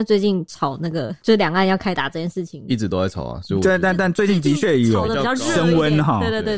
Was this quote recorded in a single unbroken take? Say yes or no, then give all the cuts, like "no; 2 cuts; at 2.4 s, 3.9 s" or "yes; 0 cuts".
yes; 0 cuts